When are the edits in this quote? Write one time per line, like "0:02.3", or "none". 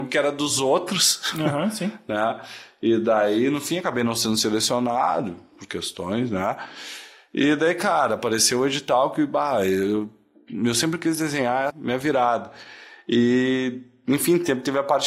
0:11.7